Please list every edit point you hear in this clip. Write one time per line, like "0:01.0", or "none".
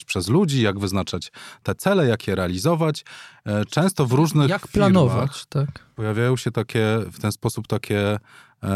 none